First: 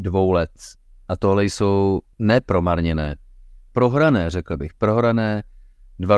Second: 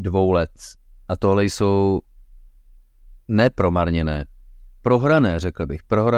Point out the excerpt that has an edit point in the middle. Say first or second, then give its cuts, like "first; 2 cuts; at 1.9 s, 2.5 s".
first; 1 cut; at 2.1 s